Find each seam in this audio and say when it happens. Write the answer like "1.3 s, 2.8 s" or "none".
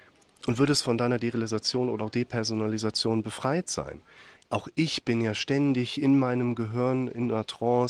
4.4 s